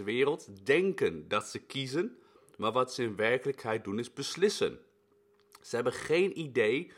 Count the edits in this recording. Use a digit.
0